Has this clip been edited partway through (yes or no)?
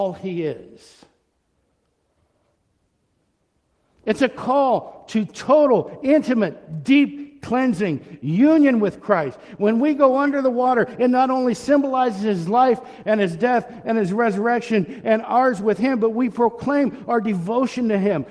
no